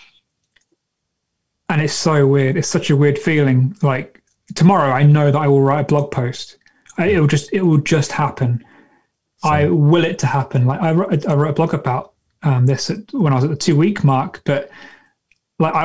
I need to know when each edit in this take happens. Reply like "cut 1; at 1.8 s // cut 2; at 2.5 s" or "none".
none